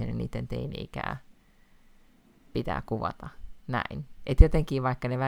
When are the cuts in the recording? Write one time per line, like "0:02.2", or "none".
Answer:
none